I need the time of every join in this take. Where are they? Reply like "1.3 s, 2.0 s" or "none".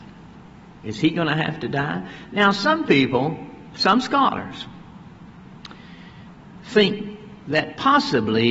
none